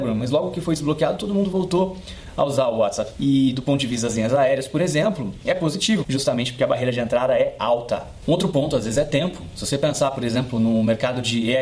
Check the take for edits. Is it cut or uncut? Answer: cut